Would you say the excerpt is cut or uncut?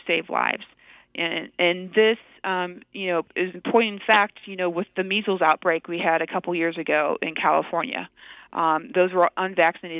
uncut